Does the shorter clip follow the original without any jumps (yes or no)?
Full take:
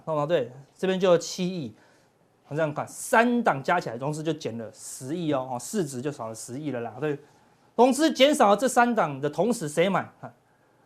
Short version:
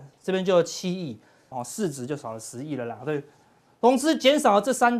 no